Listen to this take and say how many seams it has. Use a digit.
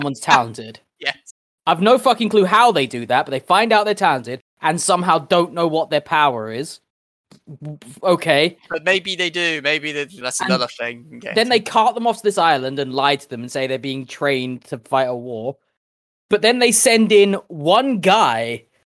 1